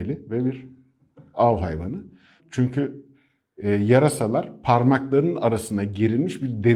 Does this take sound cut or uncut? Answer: cut